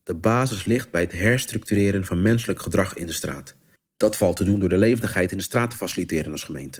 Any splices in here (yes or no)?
yes